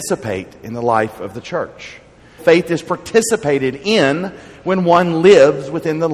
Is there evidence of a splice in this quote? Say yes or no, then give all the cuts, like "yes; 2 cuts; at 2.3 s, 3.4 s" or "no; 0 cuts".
yes; 1 cut; at 2.4 s